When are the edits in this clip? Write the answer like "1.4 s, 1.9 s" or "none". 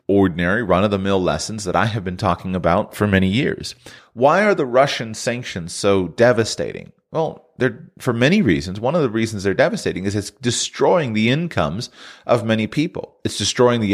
4.0 s